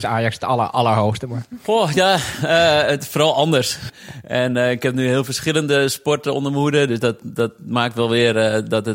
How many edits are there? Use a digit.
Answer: 2